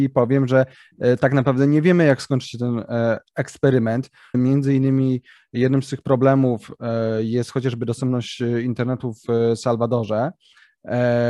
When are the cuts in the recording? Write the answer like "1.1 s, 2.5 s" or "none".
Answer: 4.3 s